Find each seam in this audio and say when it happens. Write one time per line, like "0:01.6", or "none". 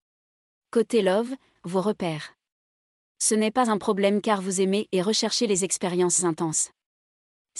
0:01.6